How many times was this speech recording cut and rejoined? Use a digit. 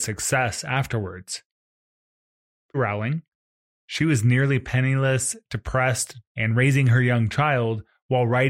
2